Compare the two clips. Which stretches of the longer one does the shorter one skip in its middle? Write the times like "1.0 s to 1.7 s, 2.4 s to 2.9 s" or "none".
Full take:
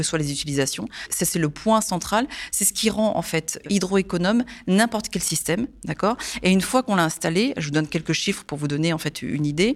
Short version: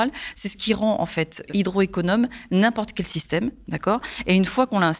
none